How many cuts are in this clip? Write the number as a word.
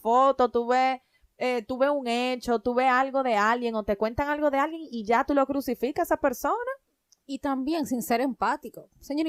one